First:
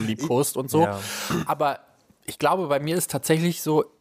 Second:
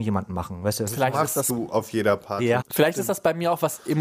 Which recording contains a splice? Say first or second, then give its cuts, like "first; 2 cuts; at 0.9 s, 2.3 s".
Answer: second; 1 cut; at 2.6 s